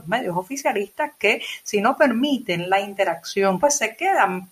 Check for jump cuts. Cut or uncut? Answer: cut